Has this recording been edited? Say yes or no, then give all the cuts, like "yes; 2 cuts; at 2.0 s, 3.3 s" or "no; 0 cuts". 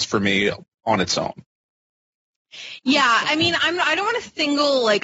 no; 0 cuts